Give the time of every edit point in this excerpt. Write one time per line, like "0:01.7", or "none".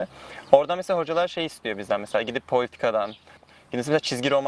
0:03.4